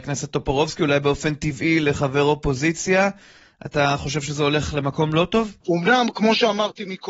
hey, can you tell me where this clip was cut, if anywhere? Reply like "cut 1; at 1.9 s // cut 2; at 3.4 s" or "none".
cut 1; at 5.6 s